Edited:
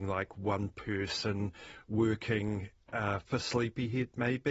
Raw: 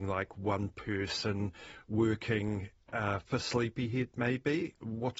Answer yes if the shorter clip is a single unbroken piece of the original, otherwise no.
yes